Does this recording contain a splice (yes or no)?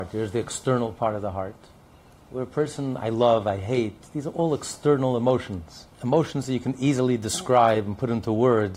yes